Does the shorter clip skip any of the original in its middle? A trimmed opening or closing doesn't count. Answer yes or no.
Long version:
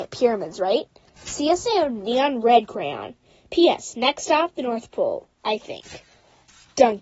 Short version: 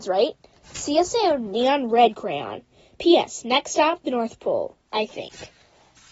no